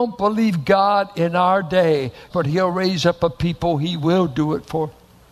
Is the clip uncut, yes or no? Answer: no